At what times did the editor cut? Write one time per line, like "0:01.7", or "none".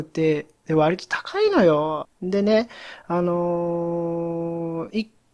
0:02.1